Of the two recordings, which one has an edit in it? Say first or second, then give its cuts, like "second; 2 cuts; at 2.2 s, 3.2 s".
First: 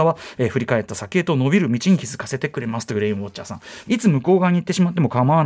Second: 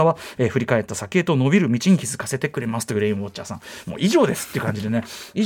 first; 1 cut; at 3.8 s